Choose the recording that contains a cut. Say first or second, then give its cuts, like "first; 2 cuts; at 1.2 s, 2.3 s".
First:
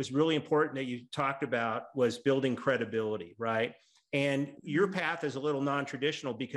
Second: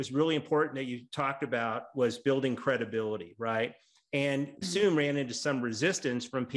second; 1 cut; at 4.6 s